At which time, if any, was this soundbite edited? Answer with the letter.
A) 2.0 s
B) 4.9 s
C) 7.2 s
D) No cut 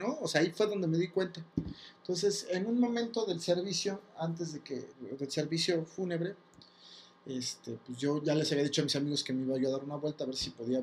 B